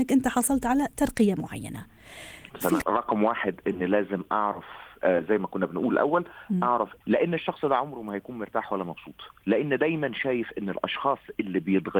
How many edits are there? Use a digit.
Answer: 2